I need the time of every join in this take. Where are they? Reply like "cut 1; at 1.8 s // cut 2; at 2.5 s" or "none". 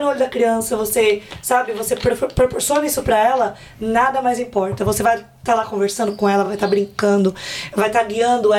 none